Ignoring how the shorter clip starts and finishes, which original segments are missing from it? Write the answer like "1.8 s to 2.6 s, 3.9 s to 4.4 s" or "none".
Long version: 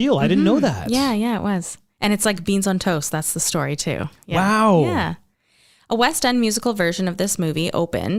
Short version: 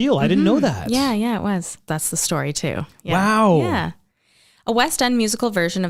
1.9 s to 3.1 s